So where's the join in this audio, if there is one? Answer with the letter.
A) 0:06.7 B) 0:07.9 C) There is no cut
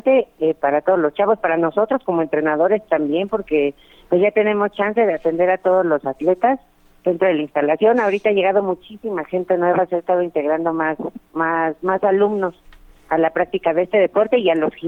C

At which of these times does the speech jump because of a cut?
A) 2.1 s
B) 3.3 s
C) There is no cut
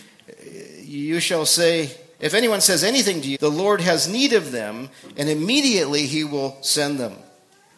B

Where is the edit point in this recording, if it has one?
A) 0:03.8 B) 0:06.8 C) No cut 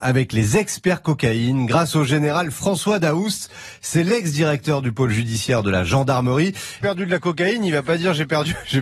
B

